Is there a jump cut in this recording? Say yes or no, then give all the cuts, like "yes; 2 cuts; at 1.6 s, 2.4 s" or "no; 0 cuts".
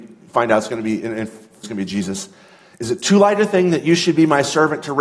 yes; 1 cut; at 1.6 s